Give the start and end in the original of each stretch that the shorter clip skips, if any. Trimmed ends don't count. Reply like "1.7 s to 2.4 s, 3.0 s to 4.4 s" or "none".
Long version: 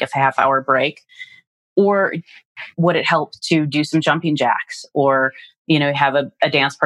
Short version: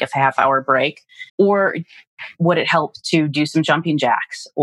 1.3 s to 1.7 s